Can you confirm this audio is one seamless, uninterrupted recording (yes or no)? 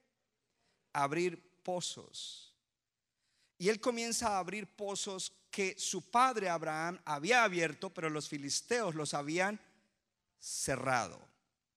yes